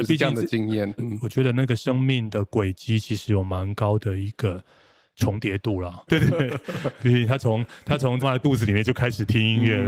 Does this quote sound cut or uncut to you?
cut